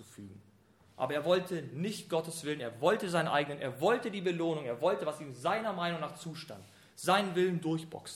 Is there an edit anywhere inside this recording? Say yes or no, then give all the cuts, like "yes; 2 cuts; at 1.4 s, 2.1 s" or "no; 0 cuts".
no; 0 cuts